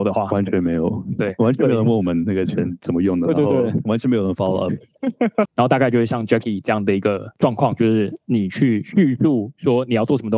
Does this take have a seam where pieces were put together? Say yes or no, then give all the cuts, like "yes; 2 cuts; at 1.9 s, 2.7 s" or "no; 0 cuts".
yes; 1 cut; at 5.5 s